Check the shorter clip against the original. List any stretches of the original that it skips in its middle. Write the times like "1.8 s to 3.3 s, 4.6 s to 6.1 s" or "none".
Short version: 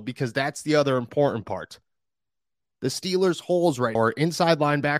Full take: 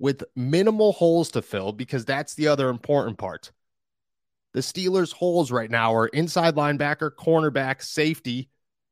5.7 s to 5.9 s

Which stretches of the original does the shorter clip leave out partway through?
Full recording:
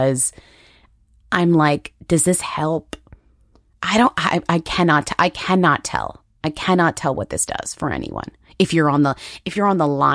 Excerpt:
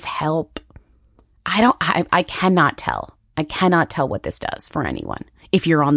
4.5 s to 5.2 s

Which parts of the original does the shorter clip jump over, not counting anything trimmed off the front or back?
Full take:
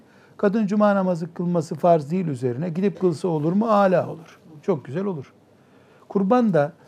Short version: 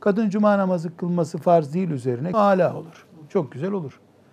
2.7 s to 3.7 s

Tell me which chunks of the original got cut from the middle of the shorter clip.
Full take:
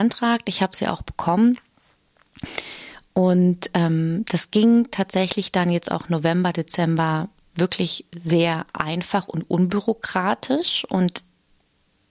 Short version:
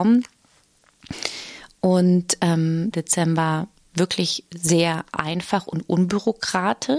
4.2 s to 6.5 s

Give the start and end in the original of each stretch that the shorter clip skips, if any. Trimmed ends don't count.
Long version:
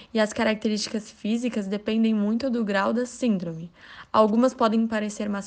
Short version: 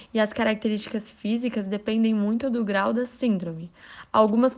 none

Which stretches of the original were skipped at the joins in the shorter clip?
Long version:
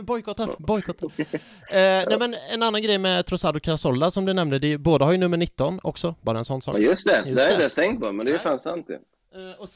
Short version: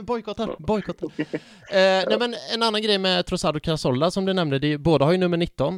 none

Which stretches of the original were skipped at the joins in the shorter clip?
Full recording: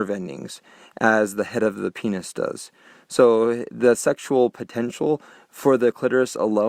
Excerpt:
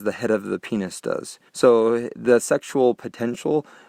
2.8 s to 3.0 s

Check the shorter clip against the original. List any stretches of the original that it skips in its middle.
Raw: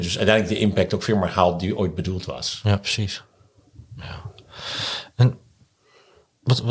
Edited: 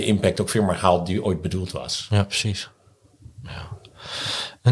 none

